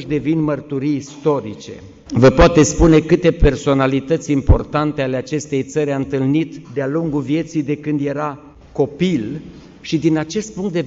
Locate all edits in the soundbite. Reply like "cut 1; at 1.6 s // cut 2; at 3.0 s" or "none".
cut 1; at 2.1 s // cut 2; at 6.6 s